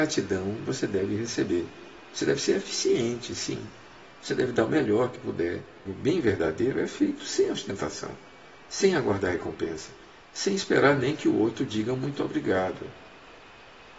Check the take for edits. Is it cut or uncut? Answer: cut